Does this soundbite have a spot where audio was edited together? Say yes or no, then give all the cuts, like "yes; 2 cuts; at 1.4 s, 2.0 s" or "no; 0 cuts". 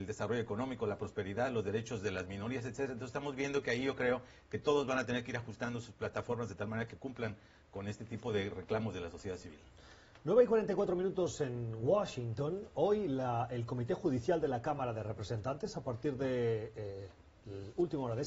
no; 0 cuts